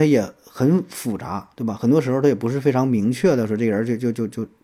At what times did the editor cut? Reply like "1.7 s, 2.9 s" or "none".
none